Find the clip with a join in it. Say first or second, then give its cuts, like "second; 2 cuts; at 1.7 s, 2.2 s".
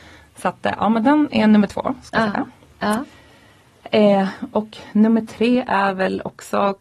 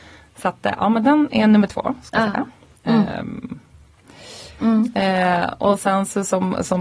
second; 2 cuts; at 2.8 s, 4.6 s